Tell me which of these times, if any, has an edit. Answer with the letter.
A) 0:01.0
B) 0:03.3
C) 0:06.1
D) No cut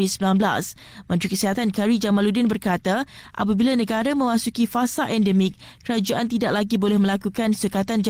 D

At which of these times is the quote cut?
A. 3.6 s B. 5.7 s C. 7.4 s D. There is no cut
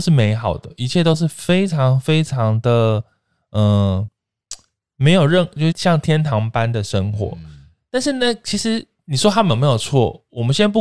B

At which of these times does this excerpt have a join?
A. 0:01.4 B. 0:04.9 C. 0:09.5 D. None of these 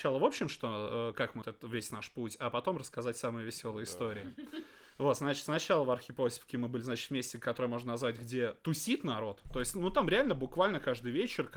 A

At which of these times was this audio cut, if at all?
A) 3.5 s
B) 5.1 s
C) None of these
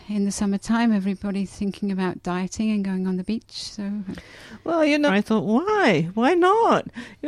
B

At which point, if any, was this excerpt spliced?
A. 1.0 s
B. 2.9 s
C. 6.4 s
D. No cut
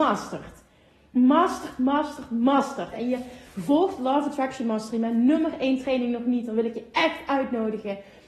B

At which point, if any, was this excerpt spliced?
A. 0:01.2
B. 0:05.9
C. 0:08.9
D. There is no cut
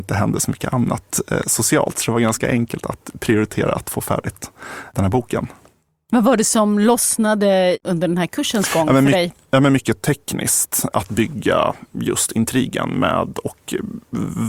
D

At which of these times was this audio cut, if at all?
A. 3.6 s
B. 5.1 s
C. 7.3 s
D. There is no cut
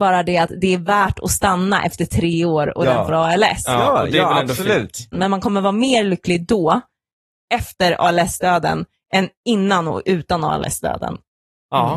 B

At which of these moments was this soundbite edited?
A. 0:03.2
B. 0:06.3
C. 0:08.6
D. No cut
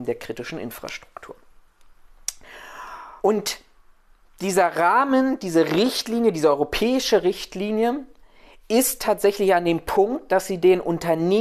A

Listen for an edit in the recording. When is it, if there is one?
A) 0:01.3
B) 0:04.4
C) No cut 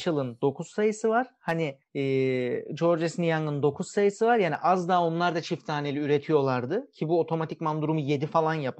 C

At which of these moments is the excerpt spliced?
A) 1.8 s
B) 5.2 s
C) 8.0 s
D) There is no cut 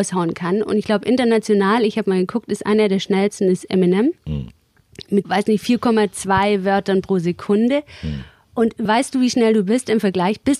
B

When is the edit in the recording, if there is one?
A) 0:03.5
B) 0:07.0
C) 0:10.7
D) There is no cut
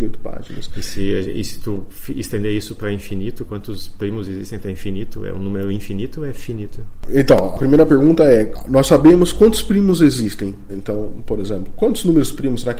C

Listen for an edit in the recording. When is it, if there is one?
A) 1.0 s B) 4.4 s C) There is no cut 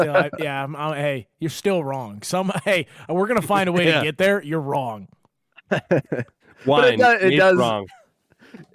C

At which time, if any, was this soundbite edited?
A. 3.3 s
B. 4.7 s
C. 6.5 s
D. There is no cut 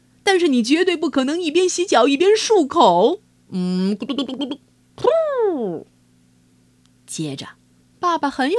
D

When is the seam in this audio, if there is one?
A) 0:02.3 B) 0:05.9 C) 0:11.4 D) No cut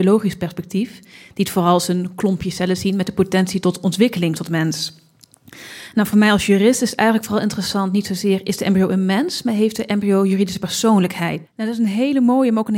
C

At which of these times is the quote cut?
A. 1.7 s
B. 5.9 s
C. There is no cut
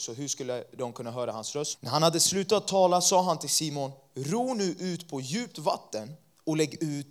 A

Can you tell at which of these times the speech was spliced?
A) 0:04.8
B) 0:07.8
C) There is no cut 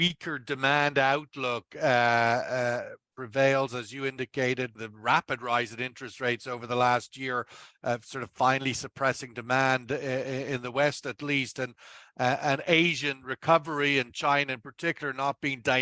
A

